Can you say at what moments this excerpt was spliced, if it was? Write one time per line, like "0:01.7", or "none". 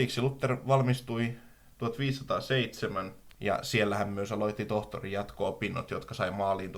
0:03.3